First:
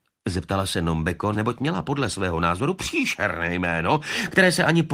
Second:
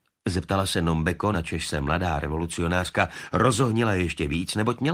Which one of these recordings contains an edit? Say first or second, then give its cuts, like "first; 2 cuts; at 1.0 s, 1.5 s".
first; 1 cut; at 1.3 s